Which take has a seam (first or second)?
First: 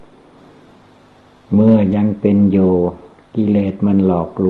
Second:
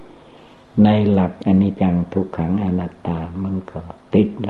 second